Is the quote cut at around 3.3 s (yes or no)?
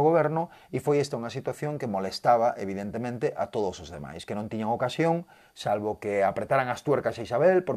no